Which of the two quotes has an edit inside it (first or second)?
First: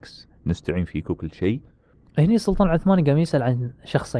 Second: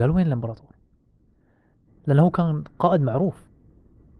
second